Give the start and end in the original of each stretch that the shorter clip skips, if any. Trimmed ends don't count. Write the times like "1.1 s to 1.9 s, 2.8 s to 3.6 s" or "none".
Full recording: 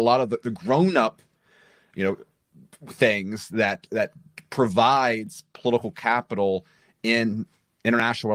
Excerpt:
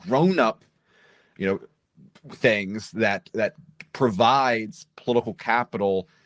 none

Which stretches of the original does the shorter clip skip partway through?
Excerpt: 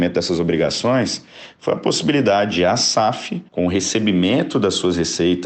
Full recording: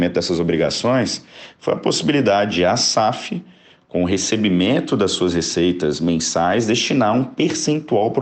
3.5 s to 3.8 s

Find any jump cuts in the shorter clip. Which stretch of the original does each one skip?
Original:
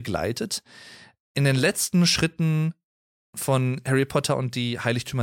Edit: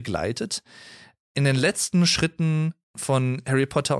2.8 s to 3.2 s

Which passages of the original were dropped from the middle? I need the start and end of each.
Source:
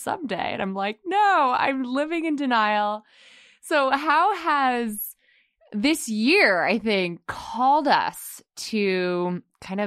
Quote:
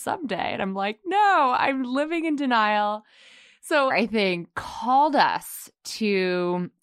3.9 s to 6.6 s

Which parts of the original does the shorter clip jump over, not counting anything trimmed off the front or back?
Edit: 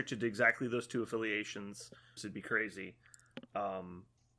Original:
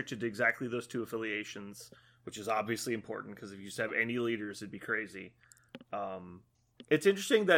2.2 s to 4.5 s

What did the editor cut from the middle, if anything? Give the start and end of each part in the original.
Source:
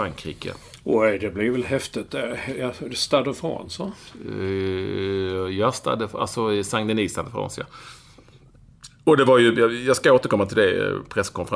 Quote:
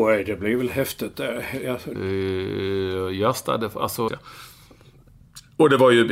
2.9 s to 4.3 s, 6.5 s to 7.6 s

